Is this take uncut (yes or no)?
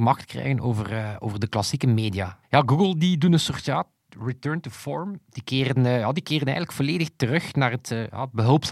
no